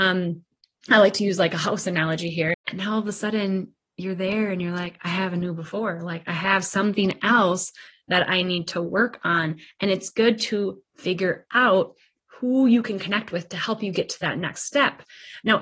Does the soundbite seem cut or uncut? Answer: cut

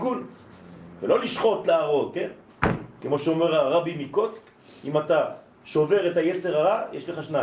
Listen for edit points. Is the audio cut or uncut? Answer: uncut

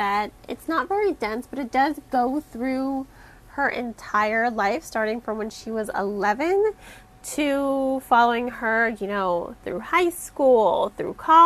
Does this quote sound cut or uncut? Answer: cut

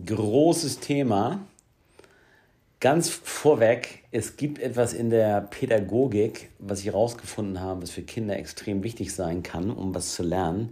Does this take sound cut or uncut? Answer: uncut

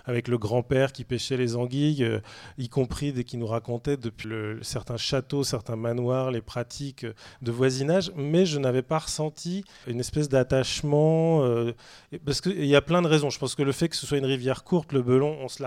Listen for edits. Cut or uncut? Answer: cut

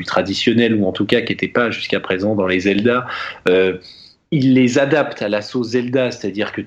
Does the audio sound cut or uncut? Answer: uncut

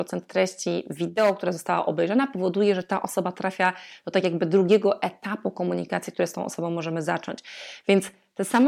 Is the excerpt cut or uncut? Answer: uncut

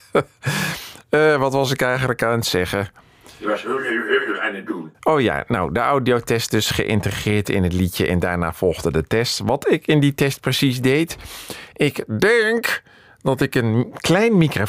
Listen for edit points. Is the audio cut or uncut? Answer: uncut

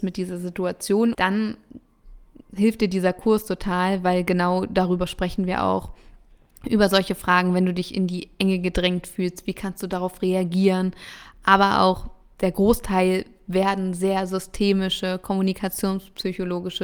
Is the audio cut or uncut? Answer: cut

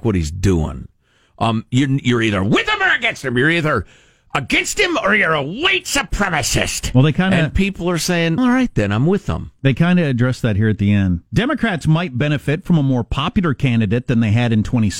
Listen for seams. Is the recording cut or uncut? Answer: cut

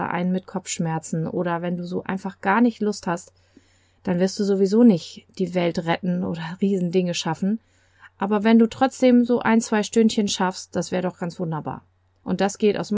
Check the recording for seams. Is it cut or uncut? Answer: uncut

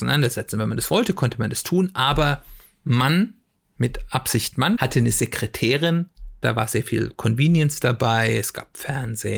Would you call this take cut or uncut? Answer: cut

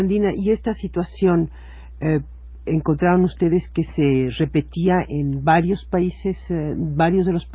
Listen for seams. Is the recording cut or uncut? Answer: uncut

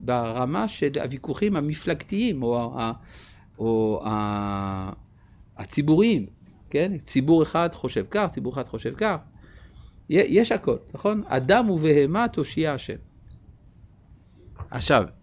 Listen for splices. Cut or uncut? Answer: uncut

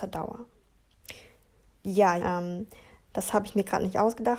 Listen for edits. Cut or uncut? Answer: cut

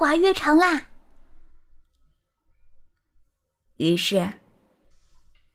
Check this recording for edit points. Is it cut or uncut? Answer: cut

